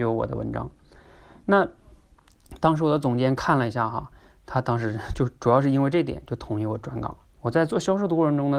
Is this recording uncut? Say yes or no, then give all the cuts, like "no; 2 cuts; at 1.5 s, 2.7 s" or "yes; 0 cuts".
no; 1 cut; at 7.3 s